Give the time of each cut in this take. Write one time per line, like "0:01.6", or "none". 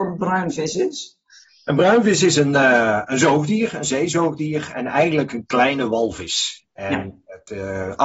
none